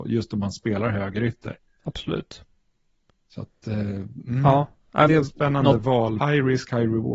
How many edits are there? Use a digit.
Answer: 2